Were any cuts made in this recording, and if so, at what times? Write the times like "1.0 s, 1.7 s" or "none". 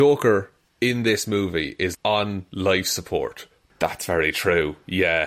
1.9 s, 3.7 s